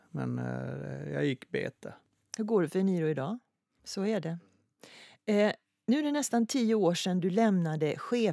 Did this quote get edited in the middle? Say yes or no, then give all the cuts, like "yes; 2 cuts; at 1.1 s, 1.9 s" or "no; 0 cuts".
yes; 1 cut; at 3.8 s